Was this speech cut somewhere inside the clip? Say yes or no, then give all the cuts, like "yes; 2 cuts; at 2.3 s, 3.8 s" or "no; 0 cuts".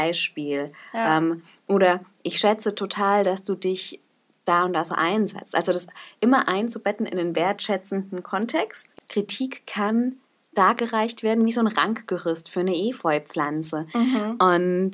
yes; 1 cut; at 9.1 s